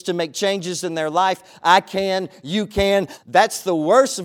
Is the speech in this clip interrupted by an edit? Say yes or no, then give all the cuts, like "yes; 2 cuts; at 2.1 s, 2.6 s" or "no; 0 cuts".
yes; 1 cut; at 3.2 s